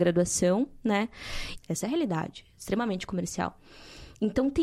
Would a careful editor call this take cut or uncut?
cut